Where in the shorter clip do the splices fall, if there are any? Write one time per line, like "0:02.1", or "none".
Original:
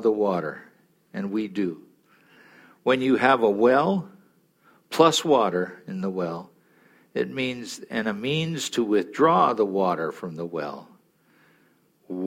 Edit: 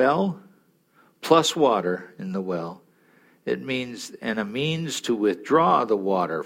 none